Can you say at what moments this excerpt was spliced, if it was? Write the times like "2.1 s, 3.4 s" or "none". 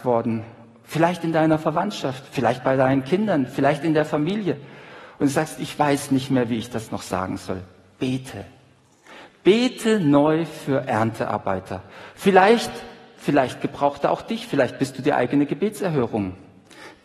12.1 s